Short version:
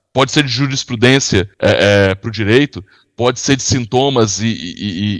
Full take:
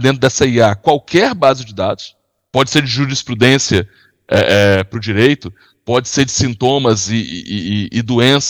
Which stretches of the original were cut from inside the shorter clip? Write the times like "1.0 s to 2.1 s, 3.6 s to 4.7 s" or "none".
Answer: 3.9 s to 4.2 s

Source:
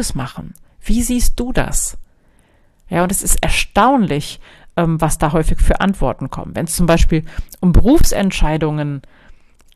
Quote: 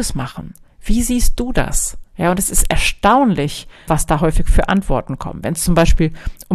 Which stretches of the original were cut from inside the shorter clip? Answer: 2.1 s to 2.8 s, 4.6 s to 5.0 s

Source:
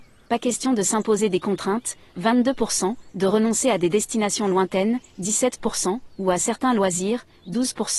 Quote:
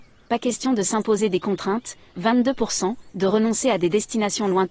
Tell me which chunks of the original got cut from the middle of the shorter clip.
none

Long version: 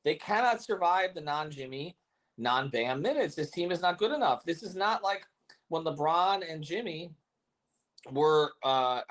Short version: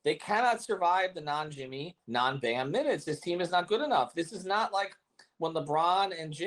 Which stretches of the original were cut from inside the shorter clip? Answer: 2.0 s to 2.3 s

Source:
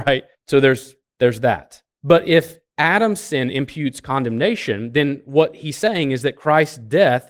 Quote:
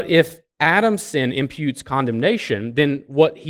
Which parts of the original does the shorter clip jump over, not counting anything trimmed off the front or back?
none

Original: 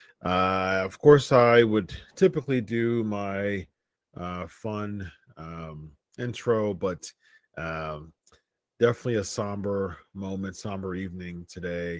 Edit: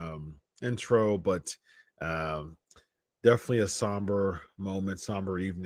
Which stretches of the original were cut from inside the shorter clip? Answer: none

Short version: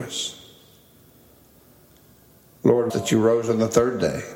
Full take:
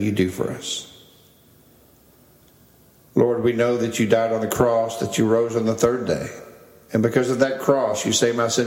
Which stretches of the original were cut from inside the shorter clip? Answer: 3.4 s to 5.0 s

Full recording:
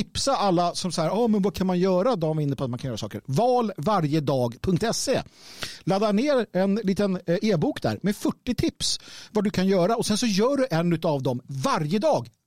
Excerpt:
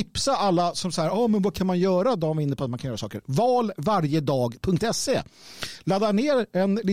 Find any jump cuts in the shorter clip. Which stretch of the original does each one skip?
none

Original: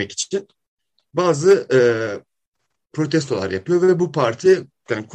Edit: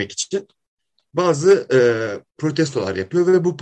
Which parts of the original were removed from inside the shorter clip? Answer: 2.3 s to 2.8 s

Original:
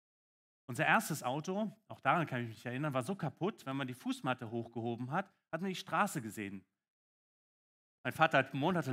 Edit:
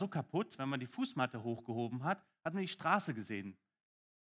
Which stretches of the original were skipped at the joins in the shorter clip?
none

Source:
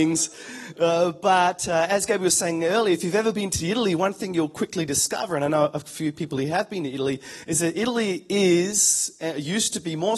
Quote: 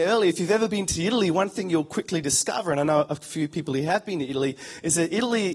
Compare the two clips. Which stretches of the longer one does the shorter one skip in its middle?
none

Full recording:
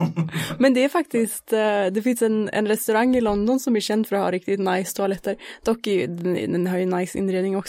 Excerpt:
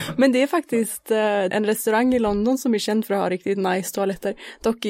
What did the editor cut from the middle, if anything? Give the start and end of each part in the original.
1.9 s to 2.5 s

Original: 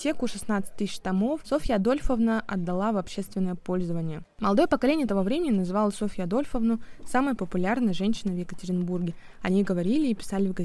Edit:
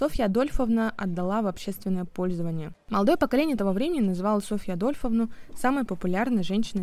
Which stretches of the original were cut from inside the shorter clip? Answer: none

